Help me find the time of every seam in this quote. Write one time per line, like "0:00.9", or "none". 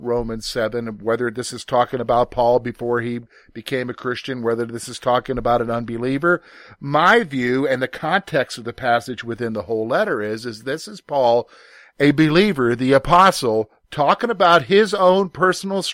none